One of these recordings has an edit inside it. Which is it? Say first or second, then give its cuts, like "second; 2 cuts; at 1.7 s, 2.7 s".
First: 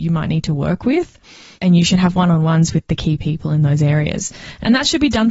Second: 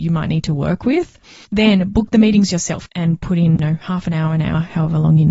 second; 2 cuts; at 1.5 s, 2.9 s